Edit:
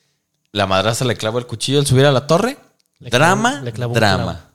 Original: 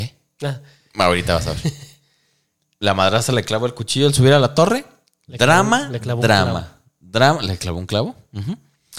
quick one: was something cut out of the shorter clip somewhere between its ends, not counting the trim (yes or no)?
no